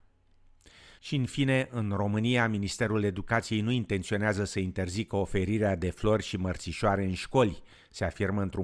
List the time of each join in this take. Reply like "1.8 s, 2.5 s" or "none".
none

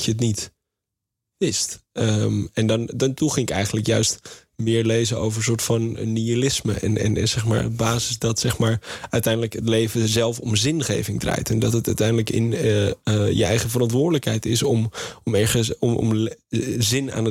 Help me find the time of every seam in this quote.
none

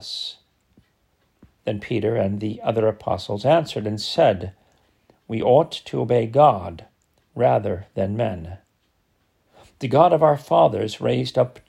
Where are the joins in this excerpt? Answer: none

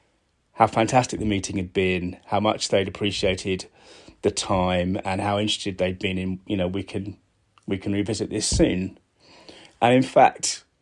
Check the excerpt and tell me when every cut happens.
6.5 s

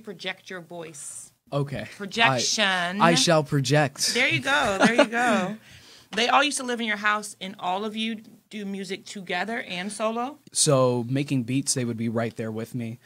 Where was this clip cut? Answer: 6.1 s, 10.4 s

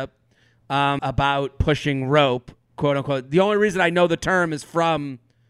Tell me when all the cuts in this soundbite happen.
1.0 s

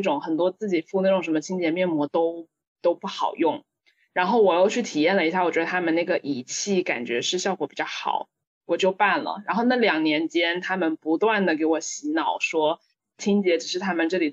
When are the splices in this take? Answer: none

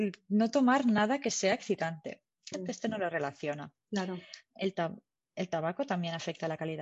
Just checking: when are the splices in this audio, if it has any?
2.5 s

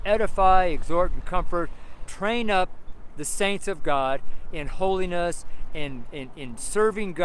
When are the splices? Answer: 2.1 s

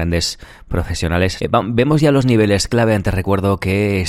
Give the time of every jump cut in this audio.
1.4 s

